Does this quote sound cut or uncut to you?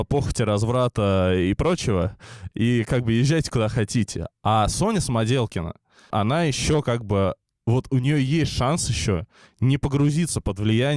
cut